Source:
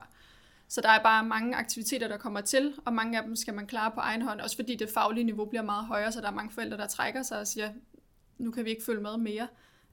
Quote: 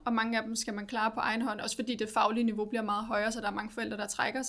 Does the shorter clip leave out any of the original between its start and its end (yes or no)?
no